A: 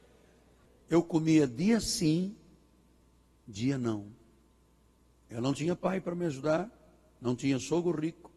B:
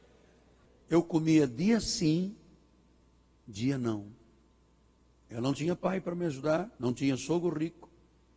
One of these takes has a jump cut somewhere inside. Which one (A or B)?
B